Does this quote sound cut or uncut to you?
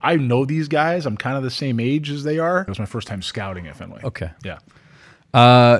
cut